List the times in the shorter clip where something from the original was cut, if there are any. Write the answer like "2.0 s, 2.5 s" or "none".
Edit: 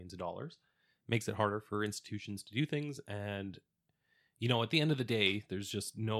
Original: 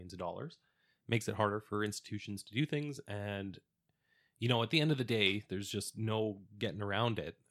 none